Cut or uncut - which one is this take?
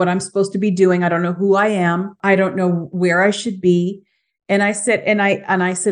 uncut